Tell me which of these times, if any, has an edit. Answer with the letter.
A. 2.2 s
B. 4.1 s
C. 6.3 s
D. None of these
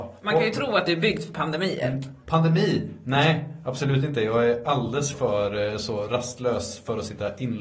A